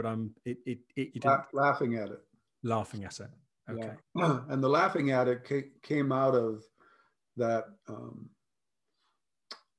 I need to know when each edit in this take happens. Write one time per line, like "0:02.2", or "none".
0:01.1